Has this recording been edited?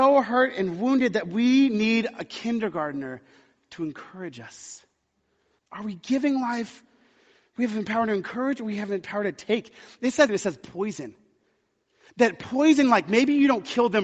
yes; 2 cuts; at 5.6 s, 10.3 s

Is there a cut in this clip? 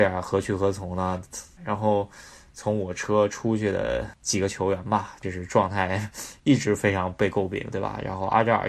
yes; 2 cuts; at 1.6 s, 5.2 s

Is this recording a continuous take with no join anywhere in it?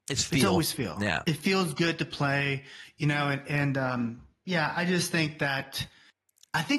yes; 0 cuts

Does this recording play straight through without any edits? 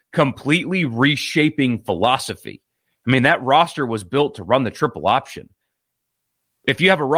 yes; 0 cuts

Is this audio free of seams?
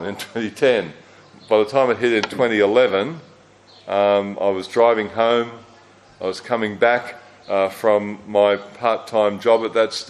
yes; 0 cuts

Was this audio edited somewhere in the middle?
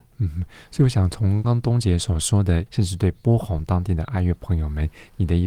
yes; 2 cuts; at 1.4 s, 2.7 s

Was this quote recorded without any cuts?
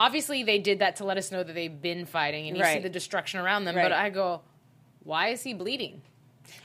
yes; 0 cuts

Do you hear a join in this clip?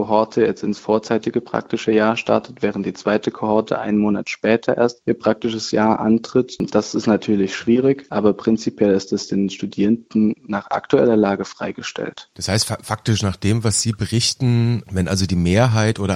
no; 0 cuts

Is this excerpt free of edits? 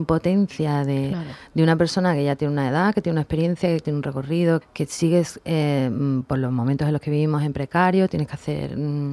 no; 1 cut; at 4.6 s

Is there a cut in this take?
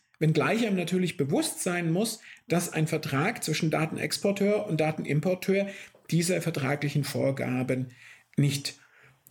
no; 0 cuts

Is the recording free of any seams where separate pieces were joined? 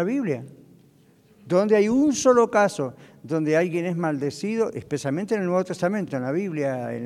yes; 0 cuts

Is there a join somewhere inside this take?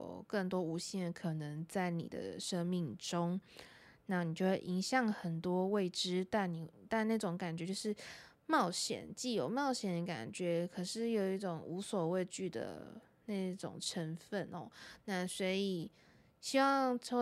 no; 0 cuts

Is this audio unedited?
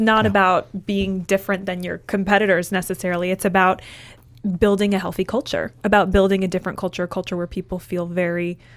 yes; 0 cuts

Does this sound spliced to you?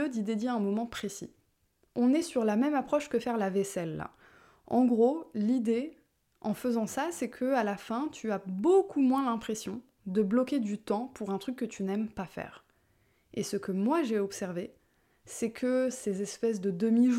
no; 0 cuts

